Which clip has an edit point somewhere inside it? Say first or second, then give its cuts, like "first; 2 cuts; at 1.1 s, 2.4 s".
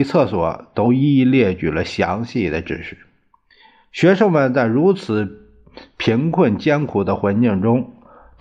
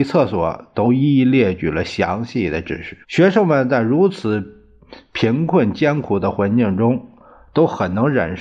second; 1 cut; at 3.0 s